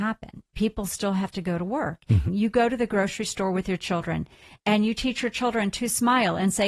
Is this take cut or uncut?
cut